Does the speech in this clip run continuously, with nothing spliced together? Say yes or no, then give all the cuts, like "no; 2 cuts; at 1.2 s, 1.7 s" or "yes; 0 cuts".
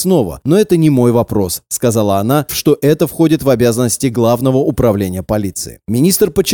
no; 1 cut; at 2.5 s